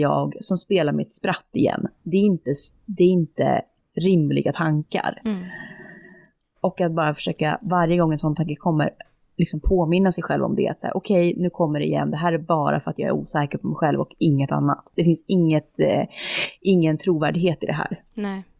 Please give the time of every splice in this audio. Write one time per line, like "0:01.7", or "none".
none